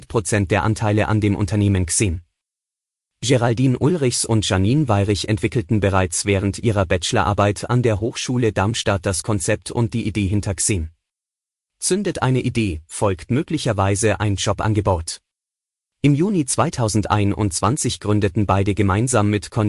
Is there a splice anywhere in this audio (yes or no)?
yes